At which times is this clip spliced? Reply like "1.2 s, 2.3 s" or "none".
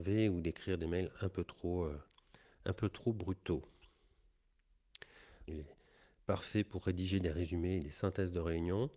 5.5 s